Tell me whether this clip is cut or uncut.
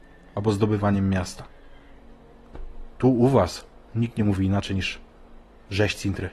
uncut